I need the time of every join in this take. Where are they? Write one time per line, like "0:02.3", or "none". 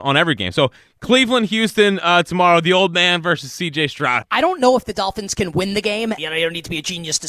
0:04.2
0:06.2